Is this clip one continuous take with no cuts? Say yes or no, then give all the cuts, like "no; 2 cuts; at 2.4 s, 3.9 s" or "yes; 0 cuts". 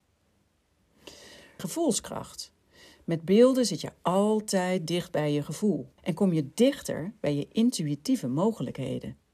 no; 2 cuts; at 1.6 s, 6.0 s